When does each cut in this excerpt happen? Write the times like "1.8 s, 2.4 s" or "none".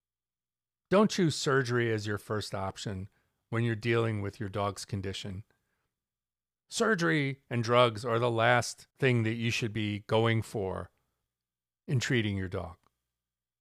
8.9 s